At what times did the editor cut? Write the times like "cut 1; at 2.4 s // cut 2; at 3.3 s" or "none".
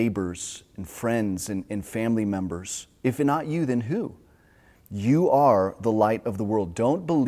none